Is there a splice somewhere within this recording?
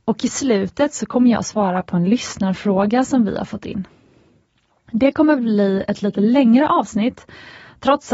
no; 0 cuts

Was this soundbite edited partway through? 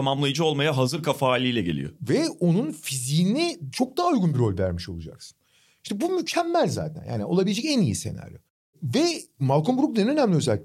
no; 0 cuts

